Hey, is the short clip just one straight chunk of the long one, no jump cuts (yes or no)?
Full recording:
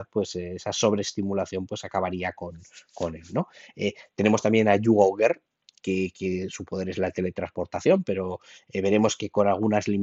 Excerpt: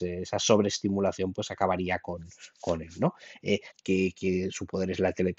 no